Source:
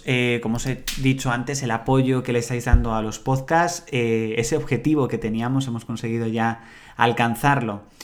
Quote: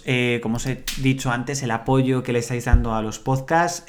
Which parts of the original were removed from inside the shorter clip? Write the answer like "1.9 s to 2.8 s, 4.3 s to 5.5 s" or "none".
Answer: none